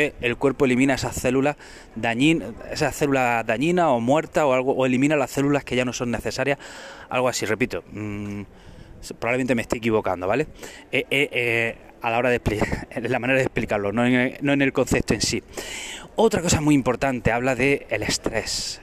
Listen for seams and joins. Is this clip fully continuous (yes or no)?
yes